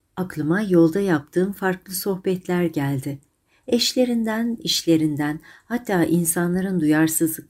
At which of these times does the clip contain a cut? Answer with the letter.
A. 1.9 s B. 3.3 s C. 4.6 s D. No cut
C